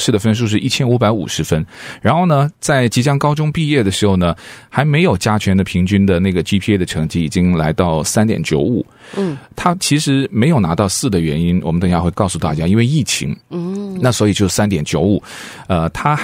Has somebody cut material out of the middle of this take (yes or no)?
yes